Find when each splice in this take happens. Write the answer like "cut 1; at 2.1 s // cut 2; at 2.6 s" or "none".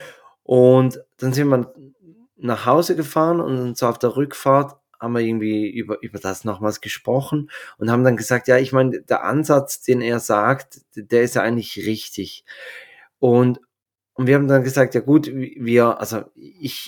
none